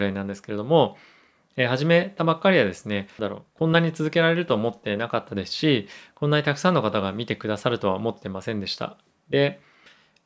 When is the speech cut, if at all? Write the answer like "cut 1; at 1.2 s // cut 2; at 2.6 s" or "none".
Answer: cut 1; at 3.2 s